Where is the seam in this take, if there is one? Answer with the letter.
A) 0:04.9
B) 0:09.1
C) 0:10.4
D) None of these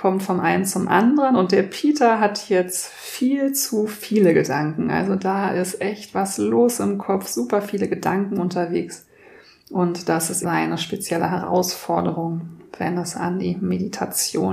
C